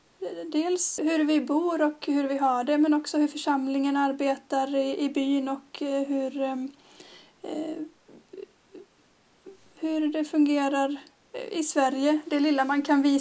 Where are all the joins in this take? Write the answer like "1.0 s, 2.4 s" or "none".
1.0 s